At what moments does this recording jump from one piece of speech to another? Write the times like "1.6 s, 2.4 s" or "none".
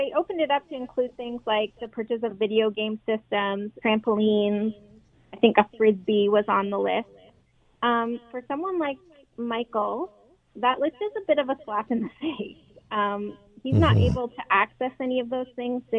3.8 s